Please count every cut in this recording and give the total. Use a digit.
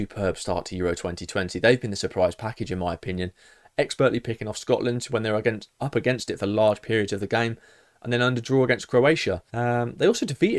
1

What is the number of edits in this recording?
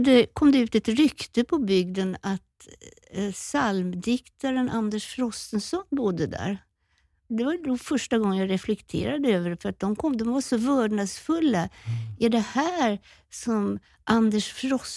0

